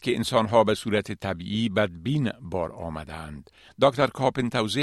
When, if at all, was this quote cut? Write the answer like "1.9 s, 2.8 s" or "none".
3.7 s